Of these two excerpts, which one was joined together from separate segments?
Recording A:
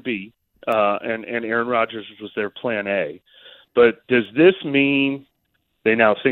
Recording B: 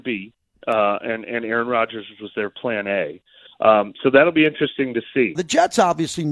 B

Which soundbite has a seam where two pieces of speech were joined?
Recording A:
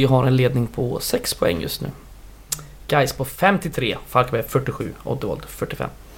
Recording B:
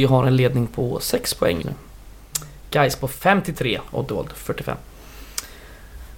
B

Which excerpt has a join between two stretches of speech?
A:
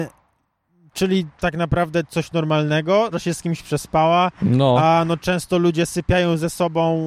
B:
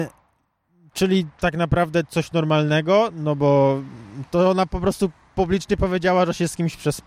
A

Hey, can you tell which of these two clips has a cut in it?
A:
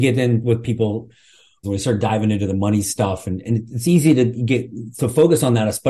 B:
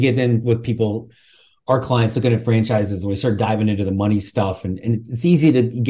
A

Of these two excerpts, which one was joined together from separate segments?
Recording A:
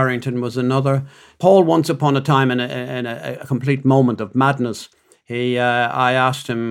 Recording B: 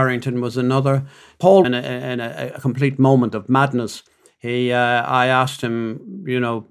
B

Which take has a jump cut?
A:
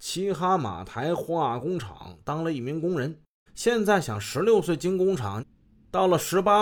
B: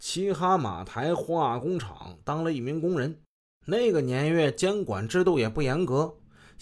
A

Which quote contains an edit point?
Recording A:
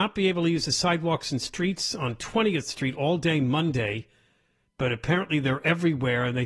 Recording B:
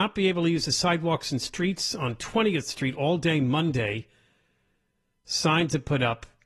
A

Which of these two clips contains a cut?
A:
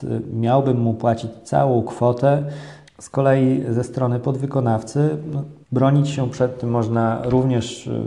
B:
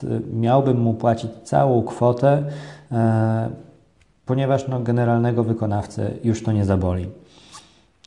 A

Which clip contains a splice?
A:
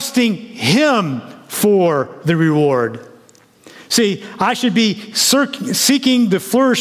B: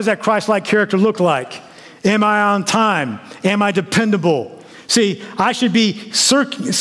B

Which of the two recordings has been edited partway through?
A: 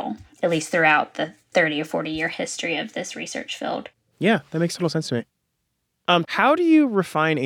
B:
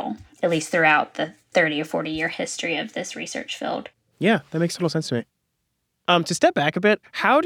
A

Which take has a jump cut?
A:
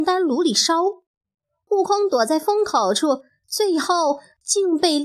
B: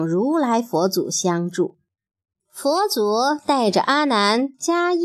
B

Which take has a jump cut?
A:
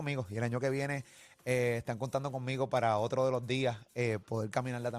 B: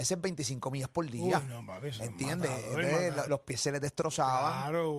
B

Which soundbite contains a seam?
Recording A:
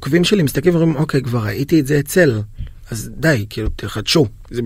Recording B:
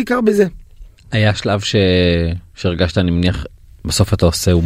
B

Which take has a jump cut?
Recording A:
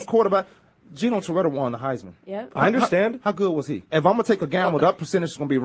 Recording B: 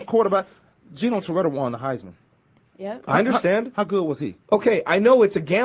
A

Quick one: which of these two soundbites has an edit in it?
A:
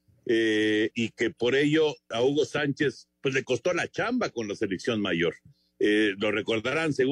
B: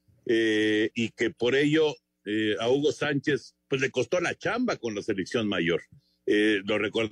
A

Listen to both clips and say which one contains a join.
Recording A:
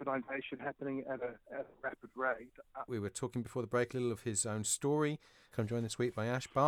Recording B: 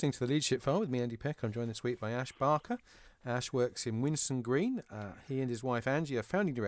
A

